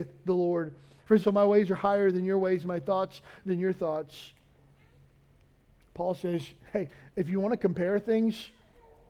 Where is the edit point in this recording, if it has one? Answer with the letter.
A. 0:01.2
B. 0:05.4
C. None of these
A